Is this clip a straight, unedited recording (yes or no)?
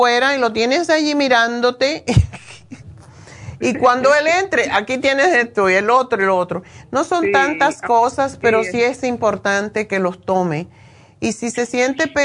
yes